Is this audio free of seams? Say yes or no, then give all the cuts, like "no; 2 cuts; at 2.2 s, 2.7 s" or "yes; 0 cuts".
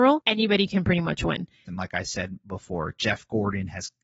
no; 1 cut; at 1.7 s